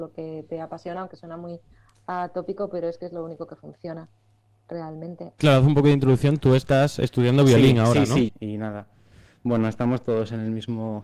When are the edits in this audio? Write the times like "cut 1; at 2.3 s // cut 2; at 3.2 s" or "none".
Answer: cut 1; at 5.4 s // cut 2; at 8.3 s